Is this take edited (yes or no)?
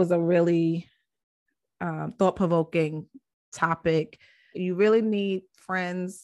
yes